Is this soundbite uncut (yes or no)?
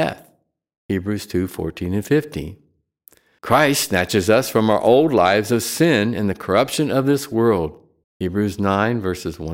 no